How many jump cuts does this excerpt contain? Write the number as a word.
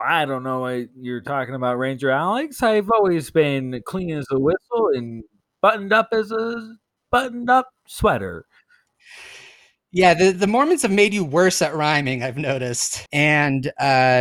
two